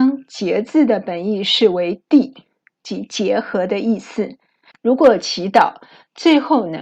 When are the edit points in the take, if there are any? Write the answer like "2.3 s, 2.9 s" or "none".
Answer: 4.7 s